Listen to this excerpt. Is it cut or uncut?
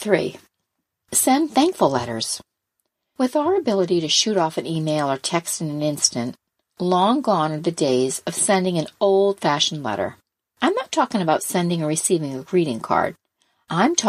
uncut